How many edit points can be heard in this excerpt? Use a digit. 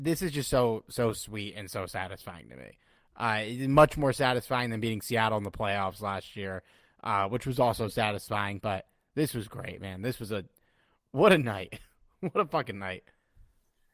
0